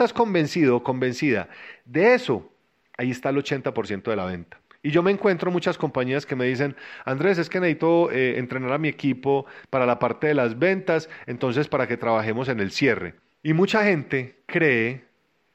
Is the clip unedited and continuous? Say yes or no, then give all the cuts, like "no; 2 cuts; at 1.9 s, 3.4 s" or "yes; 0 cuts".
yes; 0 cuts